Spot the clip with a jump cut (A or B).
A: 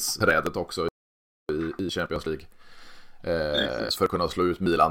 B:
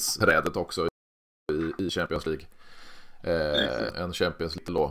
B